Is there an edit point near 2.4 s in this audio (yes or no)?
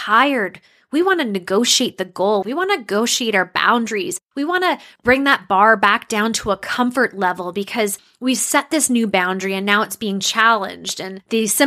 yes